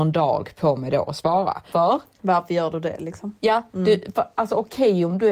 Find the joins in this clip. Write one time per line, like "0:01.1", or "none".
0:01.7